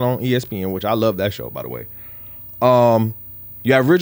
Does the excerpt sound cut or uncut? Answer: uncut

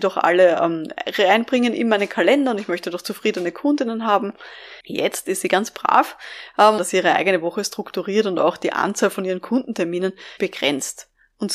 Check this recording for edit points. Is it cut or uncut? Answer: cut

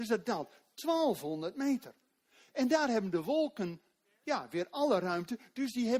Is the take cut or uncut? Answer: uncut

